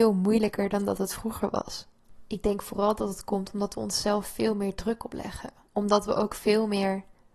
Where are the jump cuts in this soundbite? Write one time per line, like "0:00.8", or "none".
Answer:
none